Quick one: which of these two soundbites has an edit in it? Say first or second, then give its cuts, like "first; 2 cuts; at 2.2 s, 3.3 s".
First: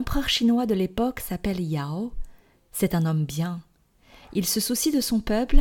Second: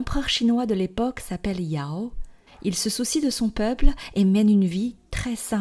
second; 1 cut; at 2.5 s